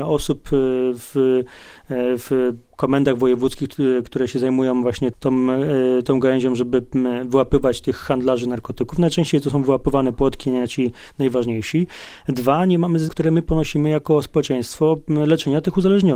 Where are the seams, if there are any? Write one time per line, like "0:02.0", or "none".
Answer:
0:05.1
0:13.1